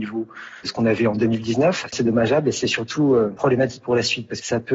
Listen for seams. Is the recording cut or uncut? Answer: cut